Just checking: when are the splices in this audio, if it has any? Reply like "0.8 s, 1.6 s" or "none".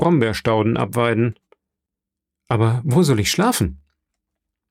none